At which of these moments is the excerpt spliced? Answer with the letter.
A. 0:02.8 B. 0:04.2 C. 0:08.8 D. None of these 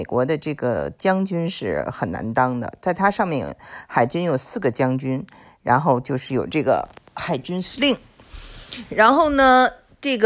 D